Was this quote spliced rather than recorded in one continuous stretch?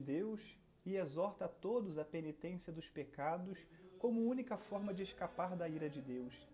no; 0 cuts

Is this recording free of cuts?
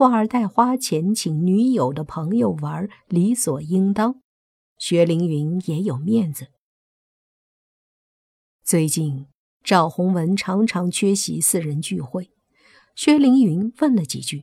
yes; 0 cuts

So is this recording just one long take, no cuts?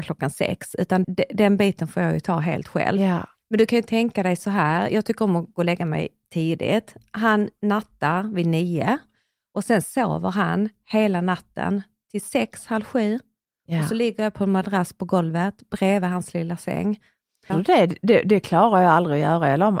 no; 2 cuts; at 1.0 s, 17.5 s

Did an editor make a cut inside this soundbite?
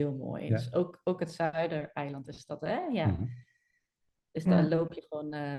no; 0 cuts

